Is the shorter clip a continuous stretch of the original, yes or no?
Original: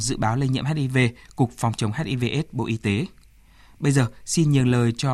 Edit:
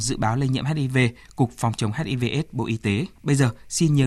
no